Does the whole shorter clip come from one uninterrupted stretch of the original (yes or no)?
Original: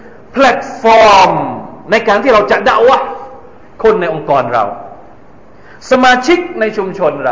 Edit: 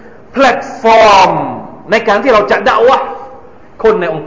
yes